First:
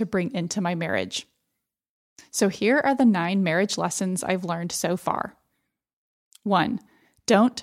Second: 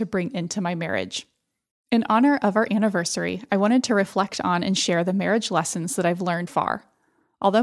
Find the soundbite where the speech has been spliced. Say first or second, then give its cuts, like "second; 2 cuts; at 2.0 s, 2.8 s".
second; 2 cuts; at 1.7 s, 6.5 s